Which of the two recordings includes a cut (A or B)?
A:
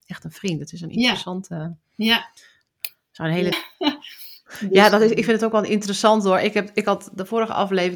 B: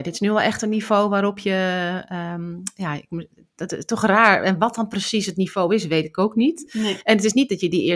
A